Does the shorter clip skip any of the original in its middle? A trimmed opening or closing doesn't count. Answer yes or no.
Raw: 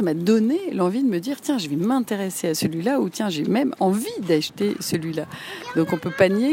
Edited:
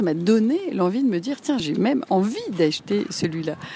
yes